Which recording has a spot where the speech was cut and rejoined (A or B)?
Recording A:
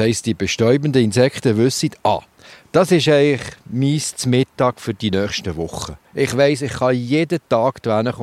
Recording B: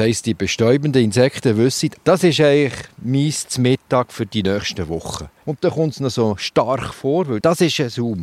B